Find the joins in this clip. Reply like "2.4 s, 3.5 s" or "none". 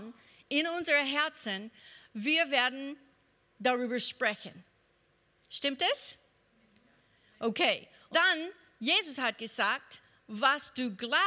8.1 s